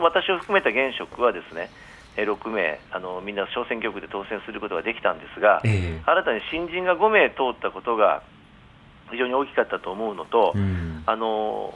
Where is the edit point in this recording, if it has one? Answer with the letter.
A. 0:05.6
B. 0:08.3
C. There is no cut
C